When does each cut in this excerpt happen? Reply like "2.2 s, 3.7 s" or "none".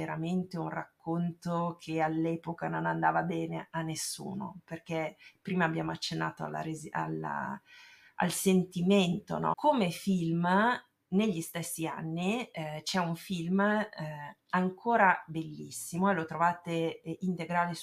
9.5 s